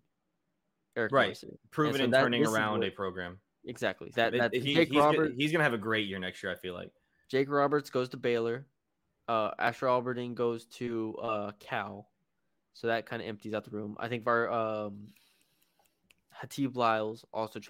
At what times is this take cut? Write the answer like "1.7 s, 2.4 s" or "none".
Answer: 4.1 s